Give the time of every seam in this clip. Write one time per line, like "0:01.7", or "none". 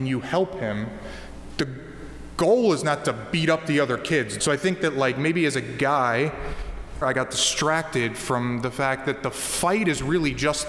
0:04.4
0:07.0